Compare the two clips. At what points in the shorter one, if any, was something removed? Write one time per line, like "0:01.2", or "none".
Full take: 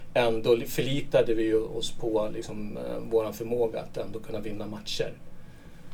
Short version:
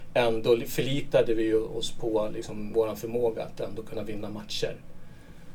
0:02.7